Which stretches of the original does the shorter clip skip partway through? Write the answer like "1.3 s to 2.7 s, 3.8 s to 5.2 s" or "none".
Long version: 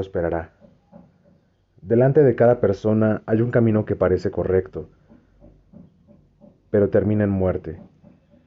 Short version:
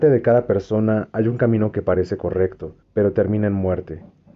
5.0 s to 6.6 s